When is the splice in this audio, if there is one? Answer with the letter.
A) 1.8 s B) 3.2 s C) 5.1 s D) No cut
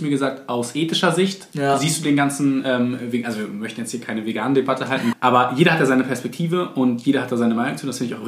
C